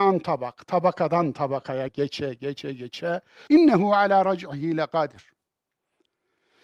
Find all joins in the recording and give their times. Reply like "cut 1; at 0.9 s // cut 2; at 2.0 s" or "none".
cut 1; at 1.9 s // cut 2; at 3.5 s